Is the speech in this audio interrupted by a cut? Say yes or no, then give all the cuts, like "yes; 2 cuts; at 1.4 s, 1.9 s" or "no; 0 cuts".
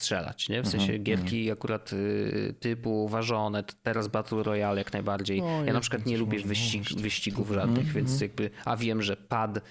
no; 0 cuts